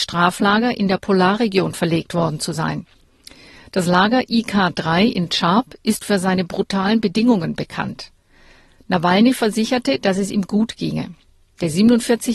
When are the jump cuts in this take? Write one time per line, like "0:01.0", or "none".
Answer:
none